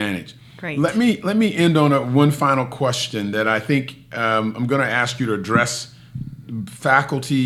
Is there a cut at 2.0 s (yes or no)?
no